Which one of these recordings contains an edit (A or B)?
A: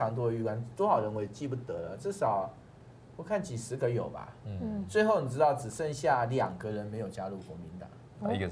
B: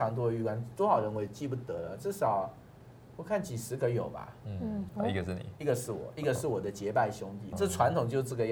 B